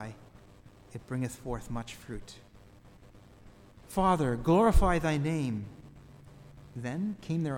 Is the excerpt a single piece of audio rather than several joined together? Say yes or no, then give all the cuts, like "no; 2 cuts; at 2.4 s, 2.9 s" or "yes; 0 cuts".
no; 1 cut; at 3.8 s